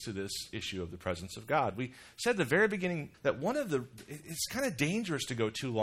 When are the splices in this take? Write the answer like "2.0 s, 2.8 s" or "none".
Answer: 3.1 s